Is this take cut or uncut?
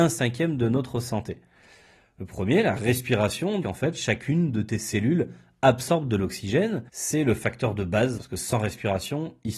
cut